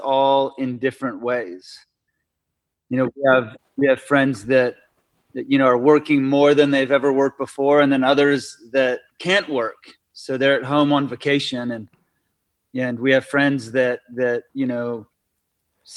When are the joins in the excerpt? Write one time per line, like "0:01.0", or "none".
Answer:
0:02.7
0:14.5